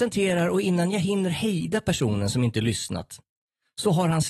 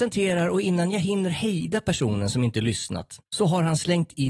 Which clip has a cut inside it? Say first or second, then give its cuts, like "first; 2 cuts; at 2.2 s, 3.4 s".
second; 1 cut; at 3.3 s